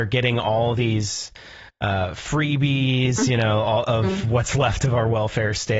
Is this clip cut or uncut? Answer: uncut